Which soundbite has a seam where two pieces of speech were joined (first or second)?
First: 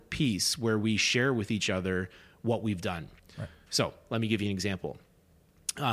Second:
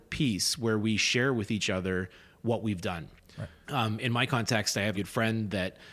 second